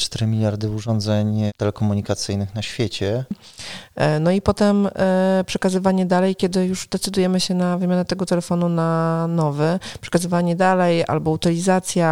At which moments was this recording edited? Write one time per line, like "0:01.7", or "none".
0:03.3